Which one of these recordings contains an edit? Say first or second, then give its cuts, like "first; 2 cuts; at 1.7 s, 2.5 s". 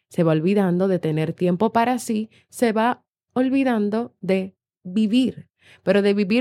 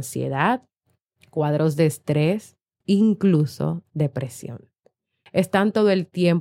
second; 2 cuts; at 2.8 s, 5.3 s